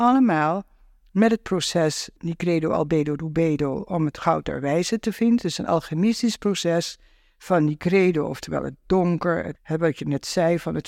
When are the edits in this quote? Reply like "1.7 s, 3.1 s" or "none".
none